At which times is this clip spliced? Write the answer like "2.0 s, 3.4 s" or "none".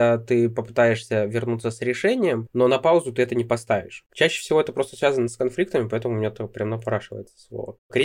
4.1 s